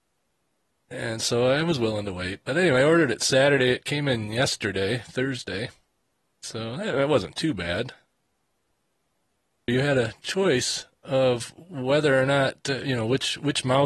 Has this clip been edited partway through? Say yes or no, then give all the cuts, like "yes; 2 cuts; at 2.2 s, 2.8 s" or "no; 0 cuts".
yes; 1 cut; at 9.7 s